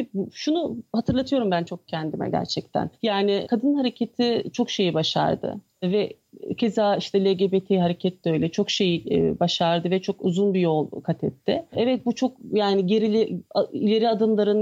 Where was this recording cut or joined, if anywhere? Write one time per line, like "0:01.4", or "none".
none